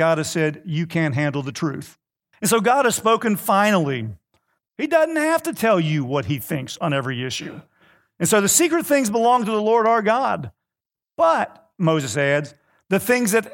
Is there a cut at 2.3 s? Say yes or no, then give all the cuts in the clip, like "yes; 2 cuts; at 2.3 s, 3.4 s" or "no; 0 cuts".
yes; 2 cuts; at 2.3 s, 4.6 s